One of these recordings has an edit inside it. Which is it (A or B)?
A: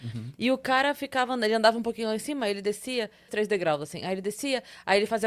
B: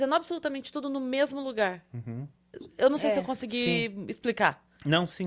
A